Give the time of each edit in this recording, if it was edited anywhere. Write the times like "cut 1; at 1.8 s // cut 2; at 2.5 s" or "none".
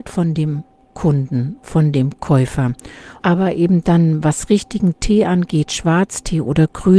cut 1; at 3.2 s